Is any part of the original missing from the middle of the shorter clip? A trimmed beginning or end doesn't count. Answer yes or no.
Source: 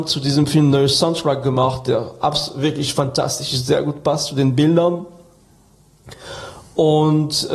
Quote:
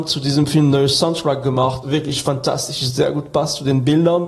yes